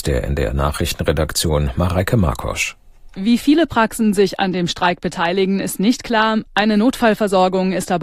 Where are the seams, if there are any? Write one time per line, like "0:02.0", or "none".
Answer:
none